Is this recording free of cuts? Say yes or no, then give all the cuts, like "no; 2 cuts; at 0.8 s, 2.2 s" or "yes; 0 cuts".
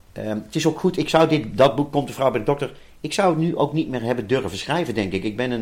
yes; 0 cuts